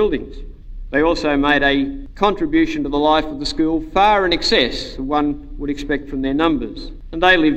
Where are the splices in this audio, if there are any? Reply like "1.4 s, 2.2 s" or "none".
0.9 s